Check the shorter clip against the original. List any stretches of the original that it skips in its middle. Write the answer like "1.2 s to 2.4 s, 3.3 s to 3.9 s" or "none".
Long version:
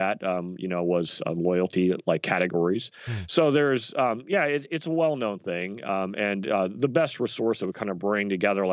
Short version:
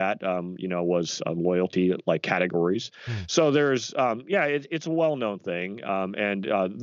none